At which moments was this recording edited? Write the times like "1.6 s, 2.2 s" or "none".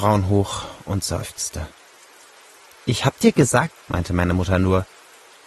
3.7 s